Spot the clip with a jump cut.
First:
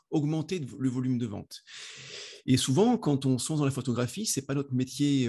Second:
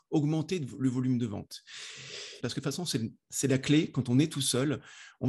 second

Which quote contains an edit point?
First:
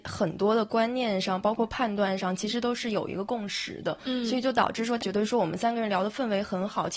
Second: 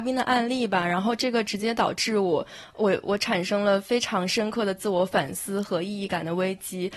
first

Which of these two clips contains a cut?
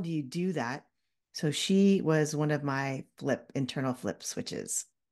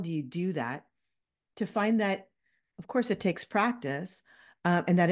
first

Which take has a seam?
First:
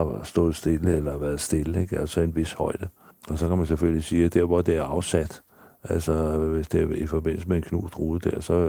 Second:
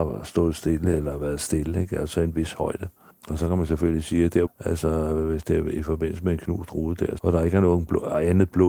second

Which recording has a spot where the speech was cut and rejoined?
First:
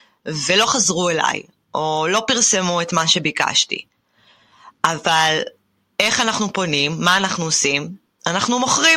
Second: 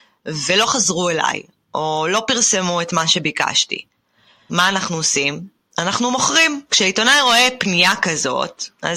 second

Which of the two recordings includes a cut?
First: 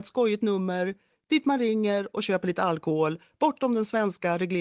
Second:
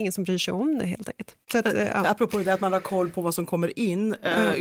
second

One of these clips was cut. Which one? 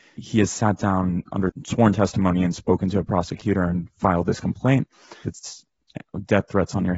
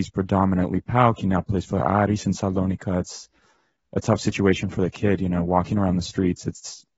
first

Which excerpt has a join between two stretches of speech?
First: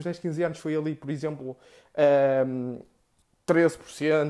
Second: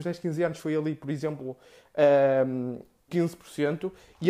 second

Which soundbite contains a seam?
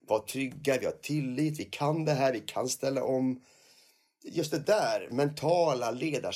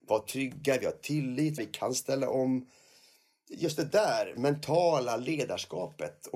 second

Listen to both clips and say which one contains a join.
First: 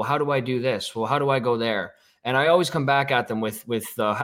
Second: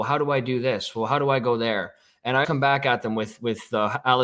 second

